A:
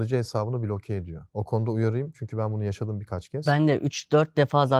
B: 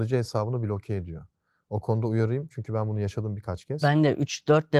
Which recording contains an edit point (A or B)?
A